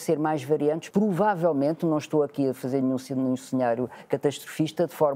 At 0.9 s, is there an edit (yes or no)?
yes